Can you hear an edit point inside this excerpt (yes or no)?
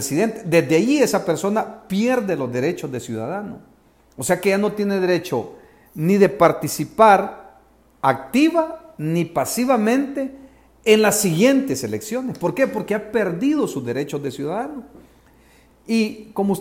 no